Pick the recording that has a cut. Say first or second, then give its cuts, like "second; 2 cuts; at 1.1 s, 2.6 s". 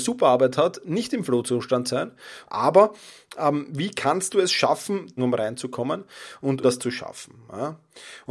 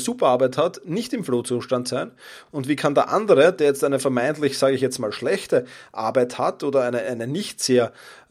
first; 3 cuts; at 2.5 s, 5.2 s, 6.6 s